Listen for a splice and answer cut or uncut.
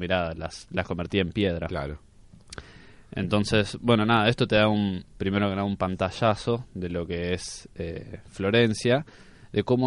uncut